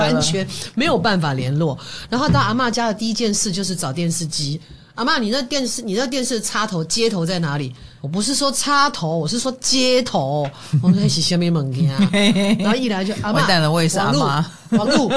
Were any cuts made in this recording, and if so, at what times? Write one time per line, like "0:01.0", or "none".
0:04.6
0:08.0